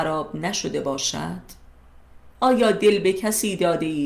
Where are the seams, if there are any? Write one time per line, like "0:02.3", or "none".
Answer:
none

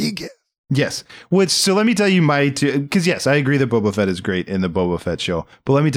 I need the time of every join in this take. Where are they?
none

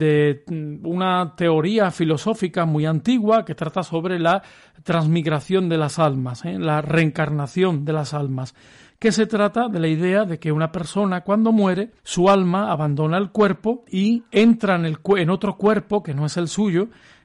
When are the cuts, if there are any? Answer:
none

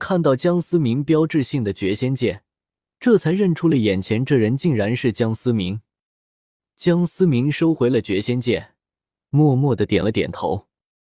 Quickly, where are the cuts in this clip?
none

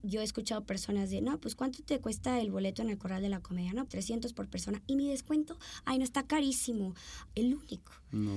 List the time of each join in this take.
0:03.9
0:07.3

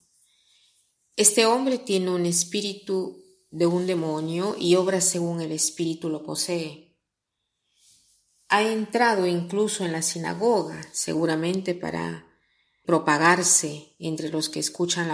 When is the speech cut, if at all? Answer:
0:12.8

